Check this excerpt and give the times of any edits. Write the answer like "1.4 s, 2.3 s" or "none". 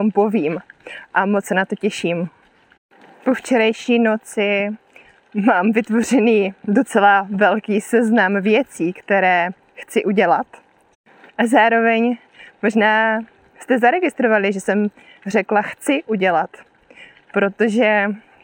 11.3 s